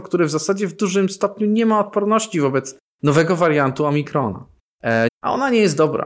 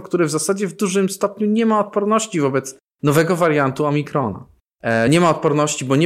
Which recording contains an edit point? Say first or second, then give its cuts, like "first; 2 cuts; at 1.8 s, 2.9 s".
first; 1 cut; at 5.1 s